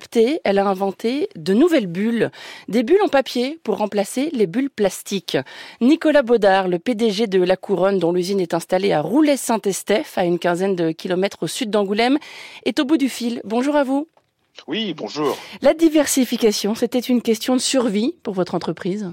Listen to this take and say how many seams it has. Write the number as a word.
zero